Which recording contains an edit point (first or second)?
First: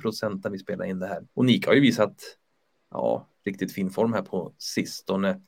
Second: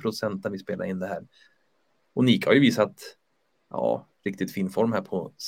first